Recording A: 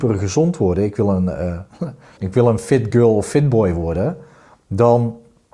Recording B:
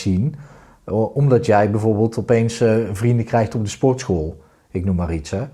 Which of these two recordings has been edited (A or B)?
A